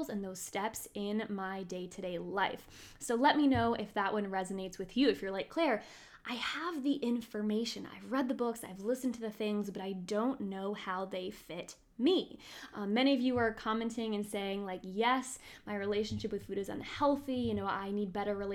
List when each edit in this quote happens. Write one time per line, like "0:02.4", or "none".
none